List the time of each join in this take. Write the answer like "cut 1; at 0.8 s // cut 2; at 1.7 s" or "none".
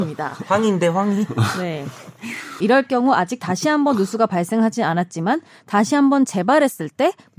cut 1; at 2.6 s